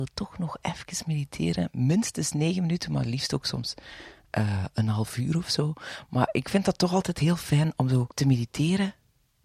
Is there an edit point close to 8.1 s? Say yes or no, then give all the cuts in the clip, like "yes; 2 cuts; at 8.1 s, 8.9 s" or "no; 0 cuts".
yes; 1 cut; at 8.1 s